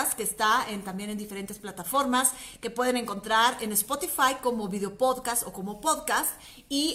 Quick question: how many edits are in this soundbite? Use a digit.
0